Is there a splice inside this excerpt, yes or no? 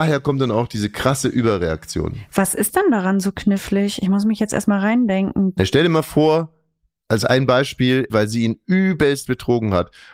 yes